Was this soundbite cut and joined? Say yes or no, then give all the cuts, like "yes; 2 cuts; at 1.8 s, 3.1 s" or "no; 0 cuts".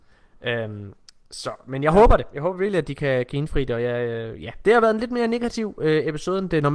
no; 0 cuts